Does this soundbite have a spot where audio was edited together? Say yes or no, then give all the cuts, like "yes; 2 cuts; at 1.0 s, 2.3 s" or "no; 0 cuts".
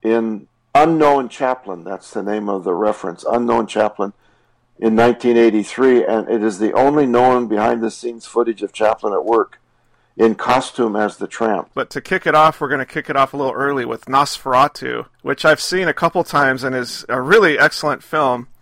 yes; 2 cuts; at 11.7 s, 15.1 s